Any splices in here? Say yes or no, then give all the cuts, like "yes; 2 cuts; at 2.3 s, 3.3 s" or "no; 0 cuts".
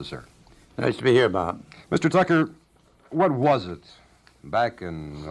yes; 1 cut; at 1.8 s